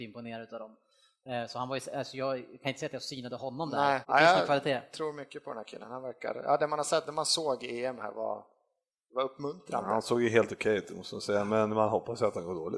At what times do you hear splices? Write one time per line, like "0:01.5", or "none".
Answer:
0:04.0